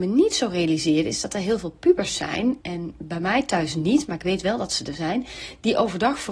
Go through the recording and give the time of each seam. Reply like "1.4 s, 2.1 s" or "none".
2.6 s